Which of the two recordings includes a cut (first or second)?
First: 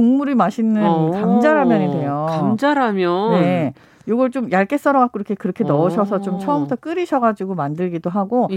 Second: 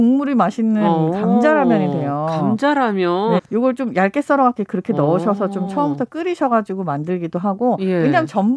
second